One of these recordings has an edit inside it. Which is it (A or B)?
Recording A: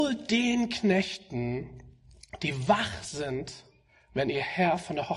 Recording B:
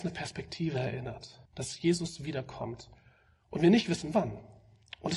B